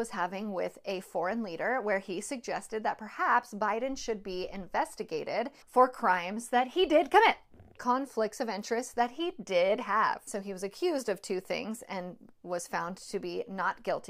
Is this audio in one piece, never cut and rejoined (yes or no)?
no